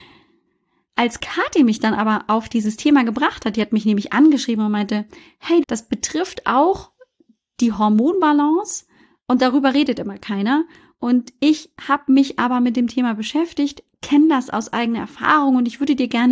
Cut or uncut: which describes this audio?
cut